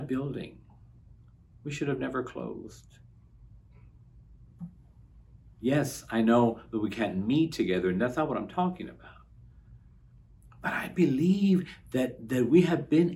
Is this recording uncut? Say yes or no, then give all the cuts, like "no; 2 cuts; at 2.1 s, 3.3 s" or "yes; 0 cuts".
yes; 0 cuts